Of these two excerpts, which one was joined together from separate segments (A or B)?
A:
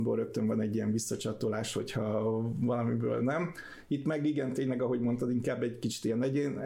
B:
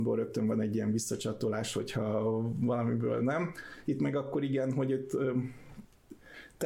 B